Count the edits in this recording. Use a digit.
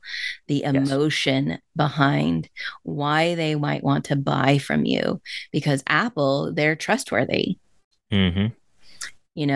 0